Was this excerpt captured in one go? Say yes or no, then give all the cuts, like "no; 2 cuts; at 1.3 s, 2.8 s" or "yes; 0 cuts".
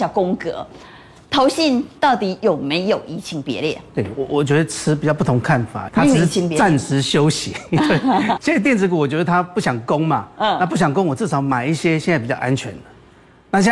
no; 2 cuts; at 5.9 s, 8.4 s